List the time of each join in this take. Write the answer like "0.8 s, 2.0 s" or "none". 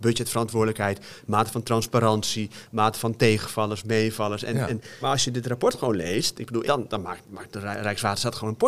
5.0 s, 6.6 s